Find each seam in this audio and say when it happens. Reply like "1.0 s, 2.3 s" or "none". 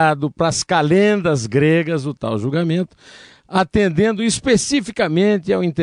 none